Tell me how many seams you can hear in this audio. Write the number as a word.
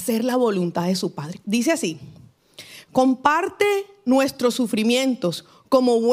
one